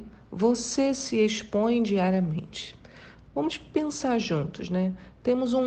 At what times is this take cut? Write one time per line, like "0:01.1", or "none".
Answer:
0:03.2